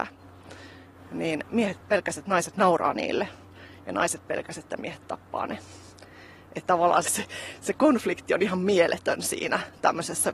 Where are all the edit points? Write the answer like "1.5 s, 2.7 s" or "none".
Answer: 7.0 s

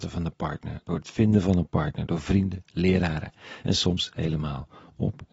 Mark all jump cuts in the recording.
none

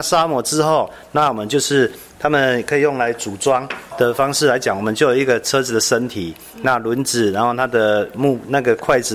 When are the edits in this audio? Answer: 3.9 s

